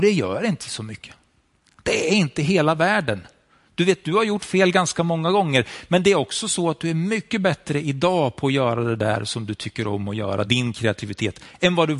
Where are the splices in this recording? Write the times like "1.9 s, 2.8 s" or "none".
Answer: none